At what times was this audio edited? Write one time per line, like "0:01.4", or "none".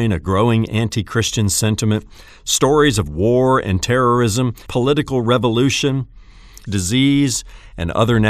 0:04.7
0:06.7